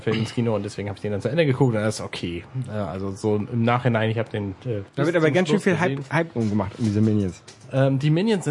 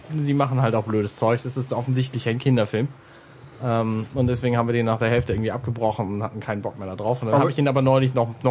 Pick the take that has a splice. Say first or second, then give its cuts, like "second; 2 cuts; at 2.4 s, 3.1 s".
first; 1 cut; at 4.9 s